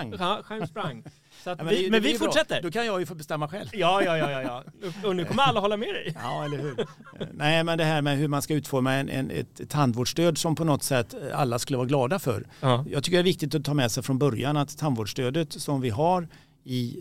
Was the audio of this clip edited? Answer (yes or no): no